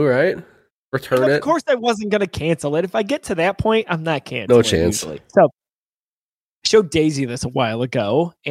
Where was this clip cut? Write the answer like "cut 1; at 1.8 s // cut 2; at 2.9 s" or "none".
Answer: none